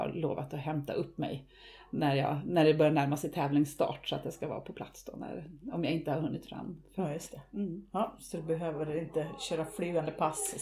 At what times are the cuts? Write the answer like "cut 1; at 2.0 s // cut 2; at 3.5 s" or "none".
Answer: none